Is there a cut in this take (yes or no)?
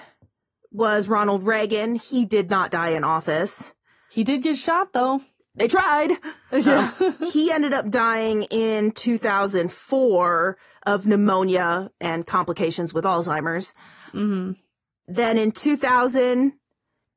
no